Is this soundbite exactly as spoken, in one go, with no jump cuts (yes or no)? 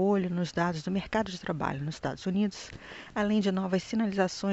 yes